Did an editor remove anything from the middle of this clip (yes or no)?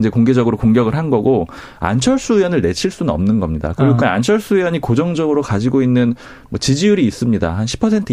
yes